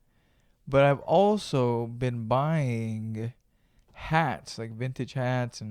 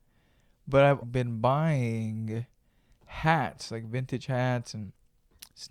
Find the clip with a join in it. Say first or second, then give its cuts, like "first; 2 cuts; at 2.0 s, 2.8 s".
second; 1 cut; at 1.0 s